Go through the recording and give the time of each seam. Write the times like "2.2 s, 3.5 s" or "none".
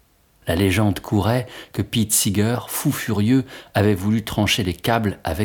none